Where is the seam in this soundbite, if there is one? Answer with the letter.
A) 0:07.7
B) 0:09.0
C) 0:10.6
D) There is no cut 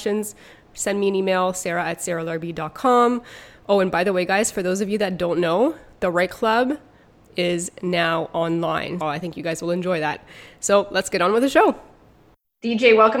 B